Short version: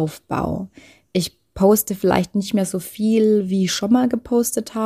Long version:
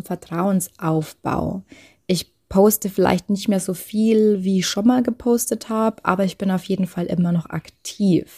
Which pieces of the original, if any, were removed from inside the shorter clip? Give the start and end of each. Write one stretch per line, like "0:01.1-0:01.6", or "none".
none